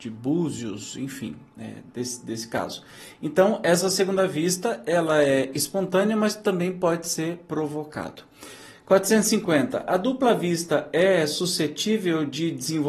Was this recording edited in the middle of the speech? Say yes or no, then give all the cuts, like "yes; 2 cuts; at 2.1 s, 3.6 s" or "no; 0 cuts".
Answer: no; 0 cuts